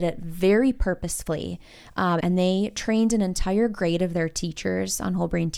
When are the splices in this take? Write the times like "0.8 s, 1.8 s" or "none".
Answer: 2.2 s